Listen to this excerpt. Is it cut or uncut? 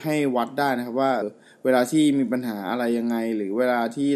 cut